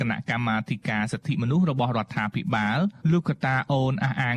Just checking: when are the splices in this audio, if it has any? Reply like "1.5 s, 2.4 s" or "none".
3.0 s